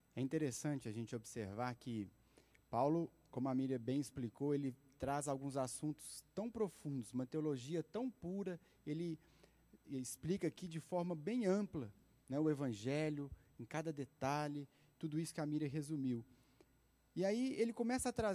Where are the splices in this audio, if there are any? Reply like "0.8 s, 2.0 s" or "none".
none

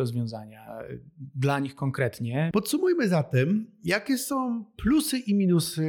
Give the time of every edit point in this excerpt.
2.5 s

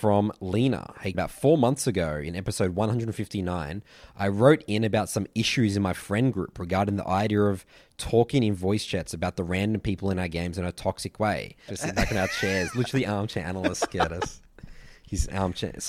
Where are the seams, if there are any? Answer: 1.1 s, 11.7 s

